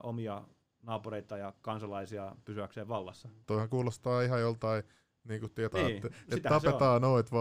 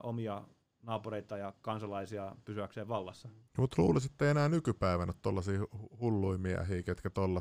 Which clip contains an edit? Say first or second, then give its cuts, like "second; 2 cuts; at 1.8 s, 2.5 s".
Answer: first; 2 cuts; at 3.4 s, 5.7 s